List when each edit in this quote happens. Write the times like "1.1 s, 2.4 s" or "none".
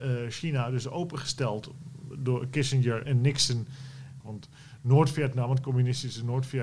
3.1 s, 4.2 s